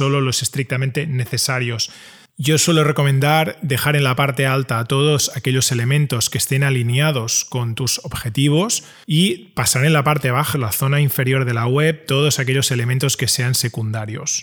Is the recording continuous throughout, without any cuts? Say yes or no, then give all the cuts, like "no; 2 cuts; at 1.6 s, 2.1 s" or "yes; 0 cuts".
no; 1 cut; at 10.5 s